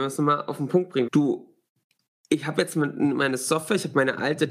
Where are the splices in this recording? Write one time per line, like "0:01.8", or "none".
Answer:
0:01.1